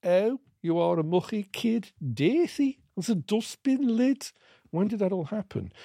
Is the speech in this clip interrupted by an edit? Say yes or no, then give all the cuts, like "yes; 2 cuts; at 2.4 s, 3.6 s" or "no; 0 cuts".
no; 0 cuts